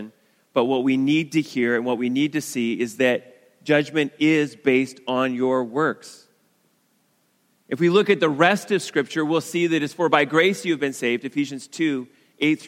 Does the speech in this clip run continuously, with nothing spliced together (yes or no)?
yes